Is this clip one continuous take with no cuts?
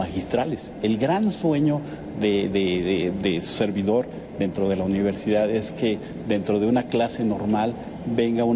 yes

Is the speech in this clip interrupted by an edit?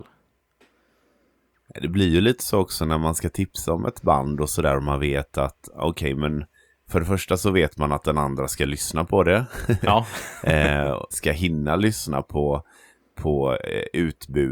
yes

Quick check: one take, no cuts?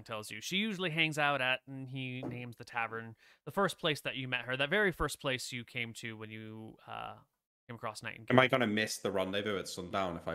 yes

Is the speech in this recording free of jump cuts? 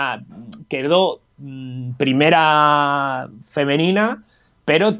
yes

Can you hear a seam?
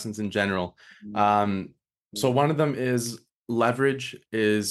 no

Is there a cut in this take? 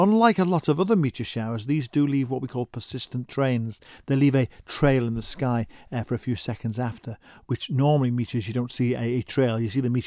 no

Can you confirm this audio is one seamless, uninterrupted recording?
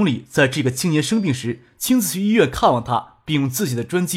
yes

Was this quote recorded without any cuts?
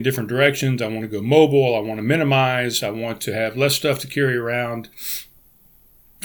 yes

